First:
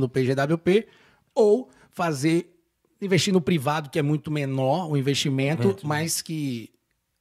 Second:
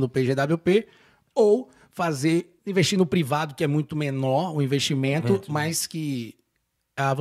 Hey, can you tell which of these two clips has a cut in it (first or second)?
second